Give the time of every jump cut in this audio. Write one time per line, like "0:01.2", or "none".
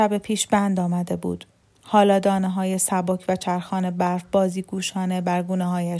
none